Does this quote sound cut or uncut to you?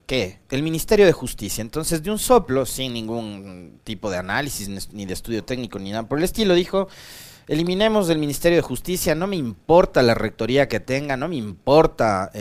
uncut